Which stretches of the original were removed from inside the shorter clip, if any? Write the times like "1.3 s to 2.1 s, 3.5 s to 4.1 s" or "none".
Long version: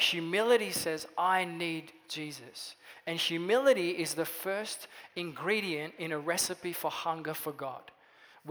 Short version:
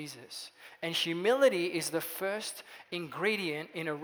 none